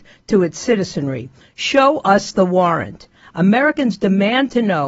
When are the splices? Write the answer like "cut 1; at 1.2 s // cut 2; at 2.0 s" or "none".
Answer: cut 1; at 1.4 s